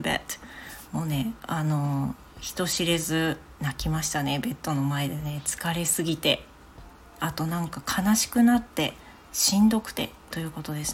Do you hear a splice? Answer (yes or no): no